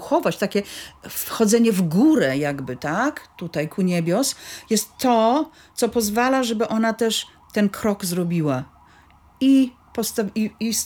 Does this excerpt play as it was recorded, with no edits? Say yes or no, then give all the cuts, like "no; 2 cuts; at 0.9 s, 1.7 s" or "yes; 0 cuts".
no; 1 cut; at 9.8 s